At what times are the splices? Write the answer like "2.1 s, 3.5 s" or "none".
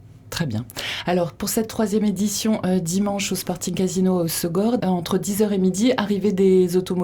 4.8 s

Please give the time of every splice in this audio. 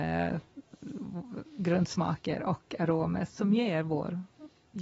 3.3 s

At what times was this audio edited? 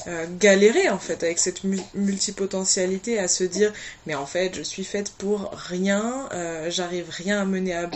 none

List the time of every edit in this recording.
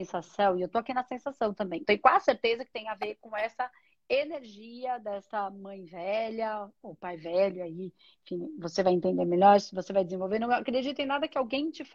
1.8 s

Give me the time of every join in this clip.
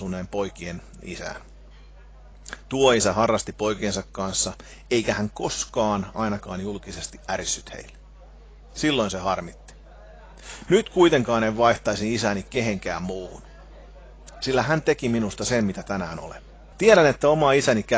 10.7 s, 16.7 s

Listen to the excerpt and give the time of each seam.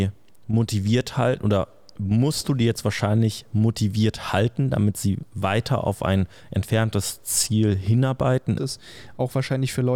8.6 s

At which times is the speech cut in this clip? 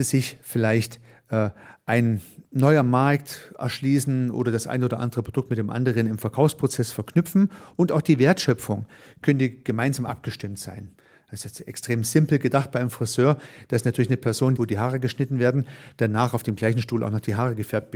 14.6 s

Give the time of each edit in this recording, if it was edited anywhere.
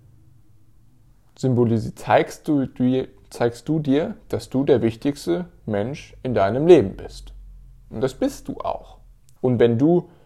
9.4 s

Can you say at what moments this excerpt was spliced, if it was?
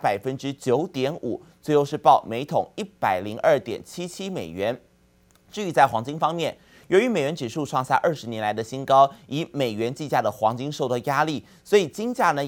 none

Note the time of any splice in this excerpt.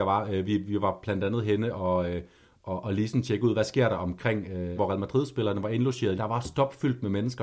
4.8 s, 6.2 s

